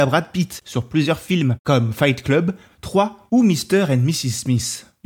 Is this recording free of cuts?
no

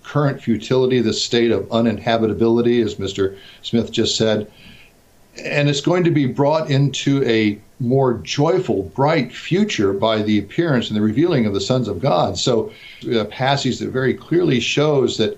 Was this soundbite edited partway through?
yes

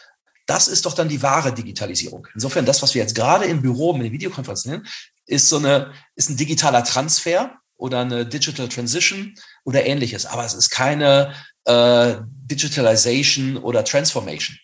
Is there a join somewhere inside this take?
no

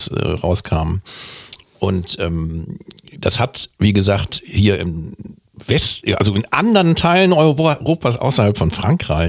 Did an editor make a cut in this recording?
no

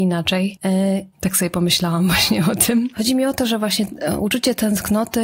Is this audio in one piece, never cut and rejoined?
no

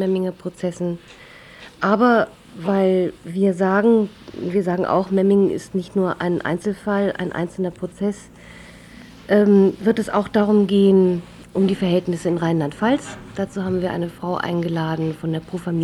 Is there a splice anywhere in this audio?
no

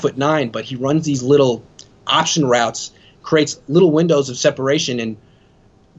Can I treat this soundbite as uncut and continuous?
yes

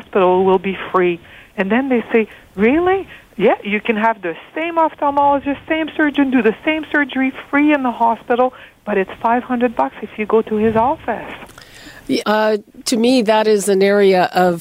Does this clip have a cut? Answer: yes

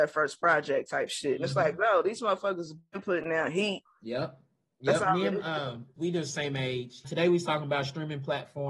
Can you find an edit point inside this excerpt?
yes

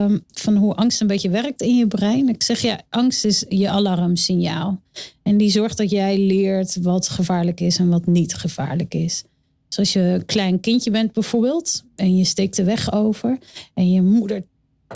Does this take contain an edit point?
no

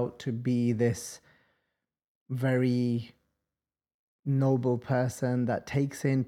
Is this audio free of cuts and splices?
yes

